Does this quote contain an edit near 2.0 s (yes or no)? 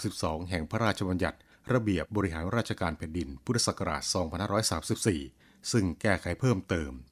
yes